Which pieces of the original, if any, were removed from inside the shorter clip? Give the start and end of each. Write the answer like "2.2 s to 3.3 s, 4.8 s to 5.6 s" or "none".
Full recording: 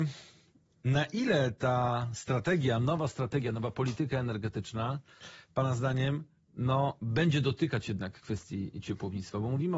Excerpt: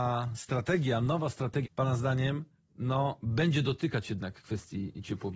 3.4 s to 5.4 s